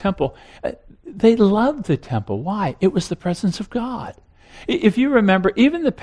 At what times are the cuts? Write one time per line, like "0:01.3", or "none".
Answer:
none

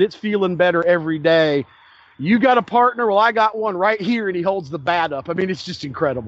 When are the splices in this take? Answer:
none

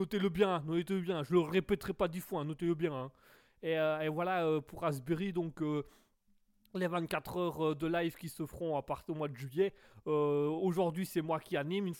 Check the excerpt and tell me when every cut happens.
none

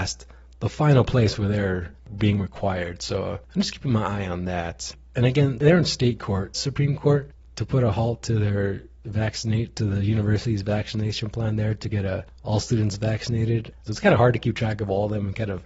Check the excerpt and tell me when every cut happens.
0:06.5
0:13.9

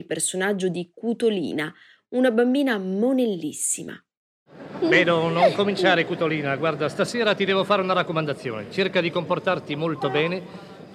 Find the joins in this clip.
none

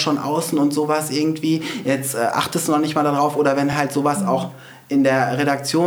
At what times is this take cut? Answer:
none

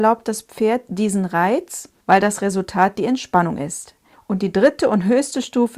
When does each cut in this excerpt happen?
0:02.0
0:04.1

